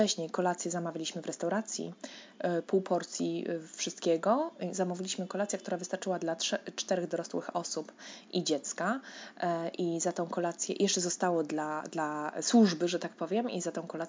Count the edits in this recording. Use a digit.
0